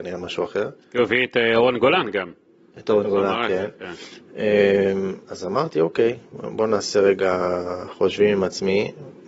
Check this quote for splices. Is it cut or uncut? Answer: uncut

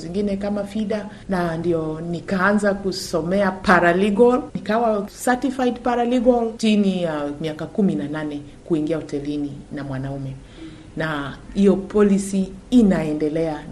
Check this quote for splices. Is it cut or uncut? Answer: cut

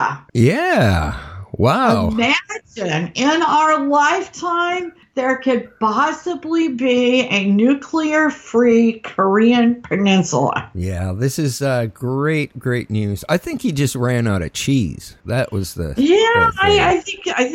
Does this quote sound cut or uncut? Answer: uncut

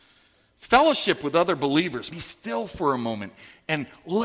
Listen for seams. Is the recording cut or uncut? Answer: cut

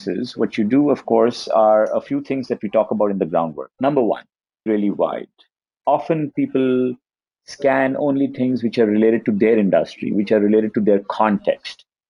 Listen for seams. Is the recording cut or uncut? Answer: cut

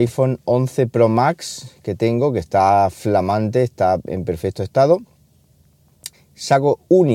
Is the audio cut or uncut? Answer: cut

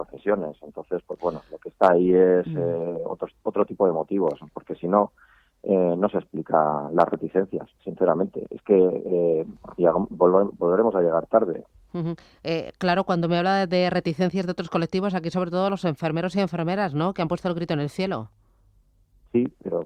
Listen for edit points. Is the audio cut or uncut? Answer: uncut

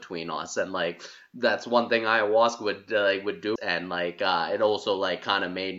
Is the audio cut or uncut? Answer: cut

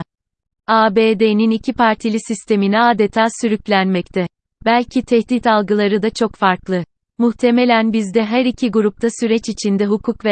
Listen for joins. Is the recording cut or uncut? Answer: uncut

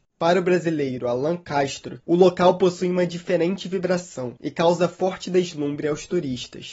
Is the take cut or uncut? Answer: cut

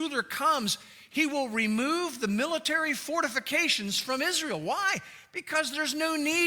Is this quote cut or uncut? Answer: uncut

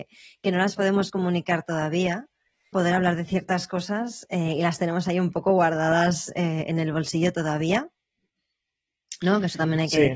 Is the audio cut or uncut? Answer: cut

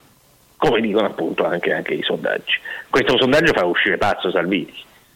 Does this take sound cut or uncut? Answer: uncut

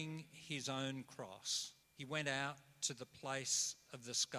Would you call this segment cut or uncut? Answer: cut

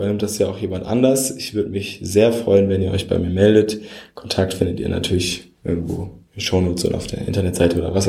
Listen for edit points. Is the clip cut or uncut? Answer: uncut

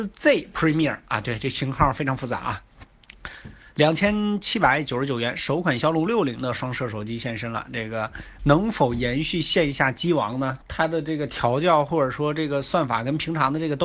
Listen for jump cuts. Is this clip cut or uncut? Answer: cut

